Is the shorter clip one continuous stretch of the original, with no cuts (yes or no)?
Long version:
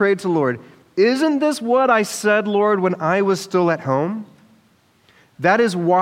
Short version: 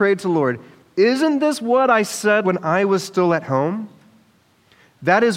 no